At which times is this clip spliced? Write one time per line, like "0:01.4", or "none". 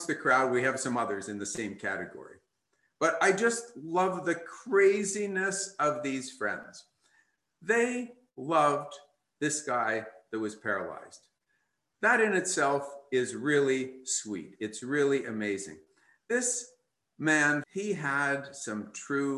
0:17.6